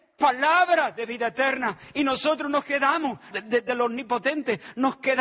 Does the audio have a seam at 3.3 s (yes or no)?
yes